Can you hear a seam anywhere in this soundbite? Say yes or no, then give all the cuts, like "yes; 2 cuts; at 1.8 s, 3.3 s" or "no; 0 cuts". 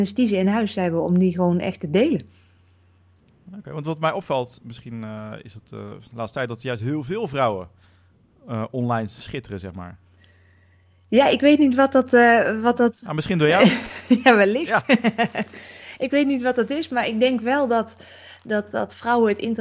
no; 0 cuts